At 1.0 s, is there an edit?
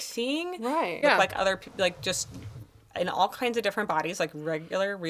yes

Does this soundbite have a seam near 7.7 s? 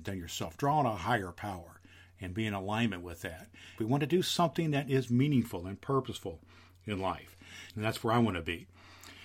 yes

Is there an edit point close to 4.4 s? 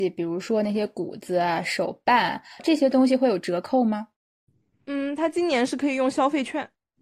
no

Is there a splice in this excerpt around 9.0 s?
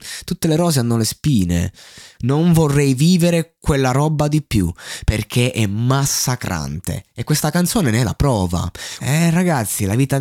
yes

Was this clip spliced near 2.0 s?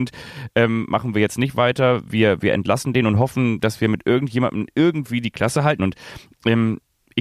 no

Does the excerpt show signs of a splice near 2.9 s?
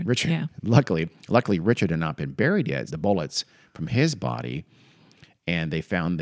yes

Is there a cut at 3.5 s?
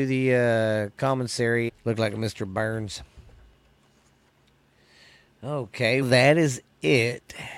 no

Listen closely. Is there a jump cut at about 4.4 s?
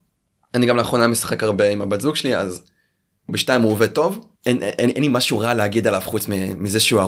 yes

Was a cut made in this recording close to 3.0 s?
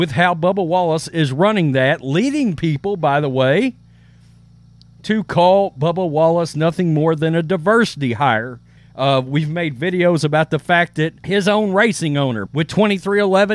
no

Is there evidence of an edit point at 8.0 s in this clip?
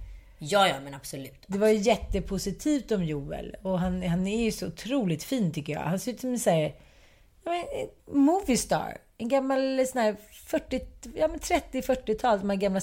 yes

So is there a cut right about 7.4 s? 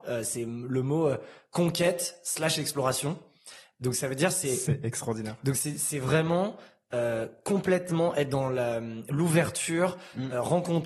no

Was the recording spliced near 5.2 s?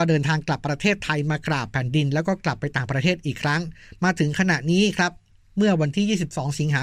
no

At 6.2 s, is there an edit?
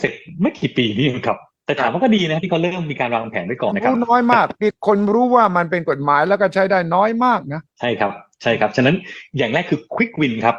no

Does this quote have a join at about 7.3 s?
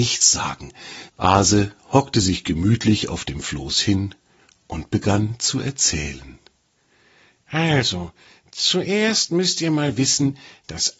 no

